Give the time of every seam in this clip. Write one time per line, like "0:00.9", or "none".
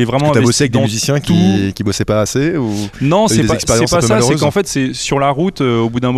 none